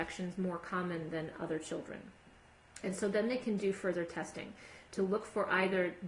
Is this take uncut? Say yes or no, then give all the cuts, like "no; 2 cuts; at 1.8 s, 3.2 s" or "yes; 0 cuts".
yes; 0 cuts